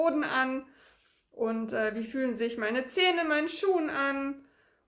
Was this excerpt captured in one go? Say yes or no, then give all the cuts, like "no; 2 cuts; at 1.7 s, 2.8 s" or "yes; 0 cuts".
yes; 0 cuts